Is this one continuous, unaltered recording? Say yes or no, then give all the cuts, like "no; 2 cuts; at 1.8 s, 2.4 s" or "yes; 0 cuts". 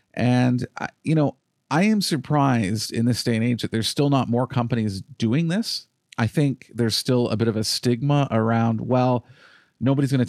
yes; 0 cuts